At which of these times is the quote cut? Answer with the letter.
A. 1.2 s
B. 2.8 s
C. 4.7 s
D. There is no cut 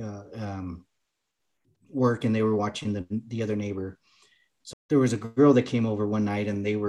C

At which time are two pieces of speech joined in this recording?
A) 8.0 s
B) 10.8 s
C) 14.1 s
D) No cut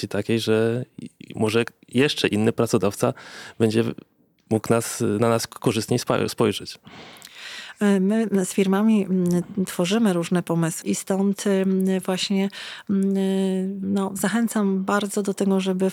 B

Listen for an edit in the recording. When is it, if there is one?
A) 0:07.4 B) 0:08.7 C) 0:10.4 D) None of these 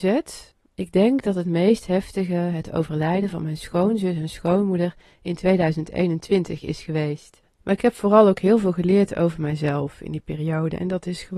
A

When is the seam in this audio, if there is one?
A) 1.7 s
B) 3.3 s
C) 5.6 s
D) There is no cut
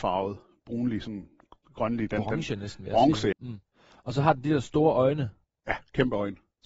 B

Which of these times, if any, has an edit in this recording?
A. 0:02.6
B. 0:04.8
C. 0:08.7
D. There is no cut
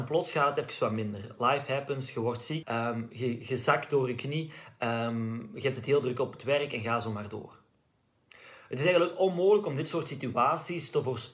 A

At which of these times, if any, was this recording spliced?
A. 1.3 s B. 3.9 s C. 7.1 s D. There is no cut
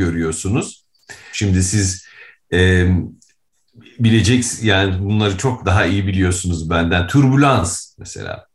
A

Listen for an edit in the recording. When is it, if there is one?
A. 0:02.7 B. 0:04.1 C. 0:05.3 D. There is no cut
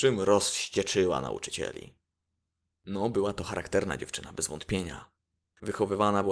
D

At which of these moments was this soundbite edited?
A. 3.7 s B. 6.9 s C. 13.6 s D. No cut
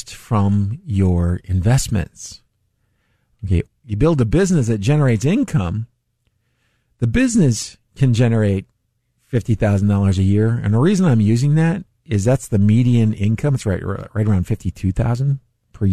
A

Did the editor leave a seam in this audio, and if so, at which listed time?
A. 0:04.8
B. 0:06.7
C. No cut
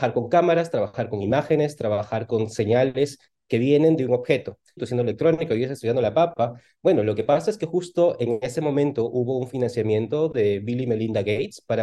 A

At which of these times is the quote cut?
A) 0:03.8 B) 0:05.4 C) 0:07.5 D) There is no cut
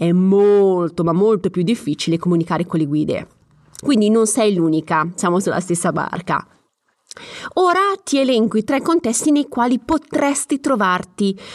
A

